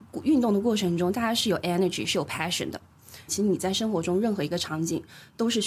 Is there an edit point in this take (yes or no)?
yes